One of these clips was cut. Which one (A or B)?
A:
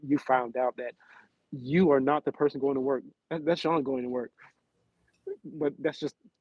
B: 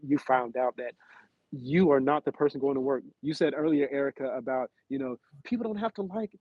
B